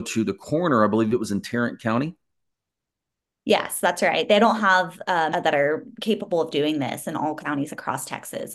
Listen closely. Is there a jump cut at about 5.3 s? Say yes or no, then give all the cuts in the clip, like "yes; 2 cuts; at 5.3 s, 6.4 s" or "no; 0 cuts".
yes; 1 cut; at 5.3 s